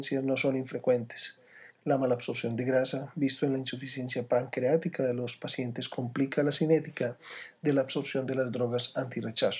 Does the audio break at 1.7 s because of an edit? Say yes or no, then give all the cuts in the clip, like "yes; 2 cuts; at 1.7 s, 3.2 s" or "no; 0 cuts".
no; 0 cuts